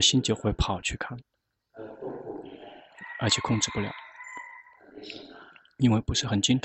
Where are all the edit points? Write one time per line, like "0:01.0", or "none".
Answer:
none